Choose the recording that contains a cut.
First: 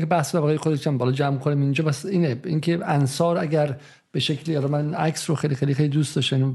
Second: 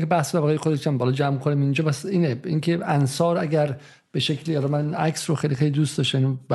second; 1 cut; at 5.6 s

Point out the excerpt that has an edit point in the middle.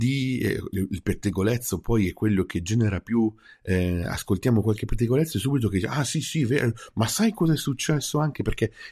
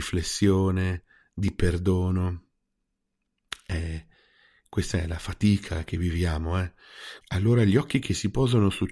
second; 1 cut; at 7.2 s

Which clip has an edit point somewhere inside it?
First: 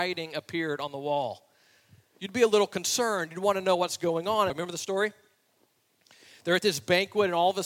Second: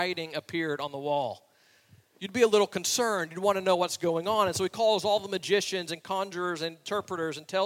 first; 1 cut; at 4.5 s

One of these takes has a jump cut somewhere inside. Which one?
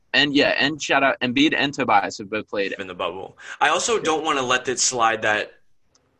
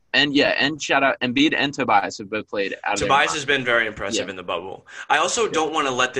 first; 1 cut; at 2.8 s

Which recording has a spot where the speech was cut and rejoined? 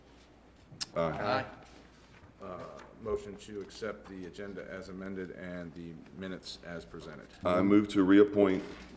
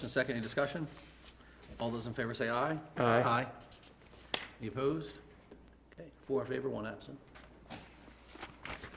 first; 2 cuts; at 0.9 s, 7.4 s

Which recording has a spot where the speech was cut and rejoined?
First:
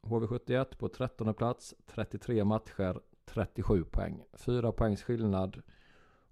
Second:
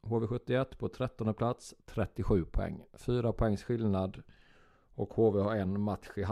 second; 1 cut; at 1.8 s

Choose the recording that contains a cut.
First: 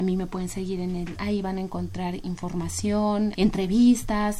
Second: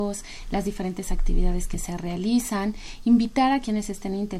first; 2 cuts; at 1.2 s, 3.3 s

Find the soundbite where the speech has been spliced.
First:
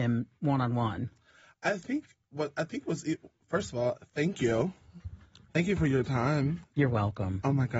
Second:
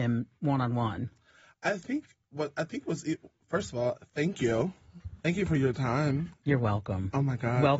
second; 1 cut; at 5.2 s

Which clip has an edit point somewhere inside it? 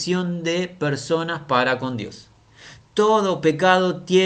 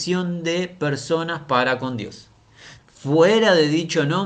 second; 1 cut; at 2.8 s

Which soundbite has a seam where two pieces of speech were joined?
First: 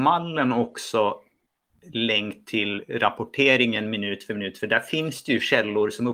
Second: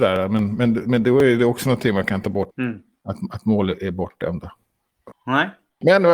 second; 2 cuts; at 2.5 s, 5.1 s

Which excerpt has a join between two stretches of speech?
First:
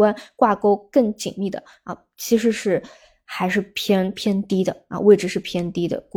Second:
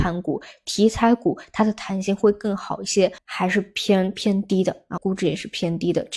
second; 2 cuts; at 3.2 s, 5.0 s

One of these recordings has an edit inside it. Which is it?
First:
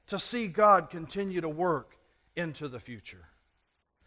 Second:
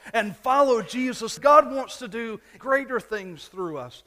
second; 2 cuts; at 1.4 s, 2.6 s

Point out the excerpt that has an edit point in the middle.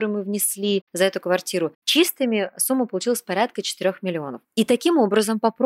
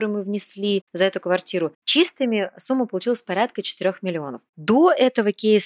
first; 1 cut; at 4.4 s

